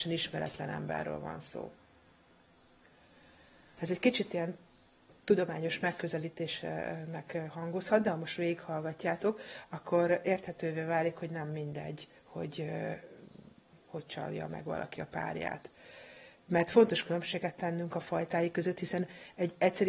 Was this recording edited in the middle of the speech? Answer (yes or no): yes